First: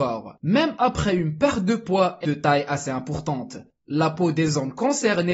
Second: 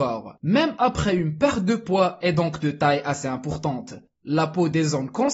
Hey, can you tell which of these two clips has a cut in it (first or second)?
first